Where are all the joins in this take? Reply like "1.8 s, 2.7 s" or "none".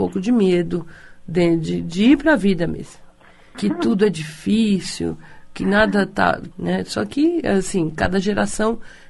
3.5 s, 6.5 s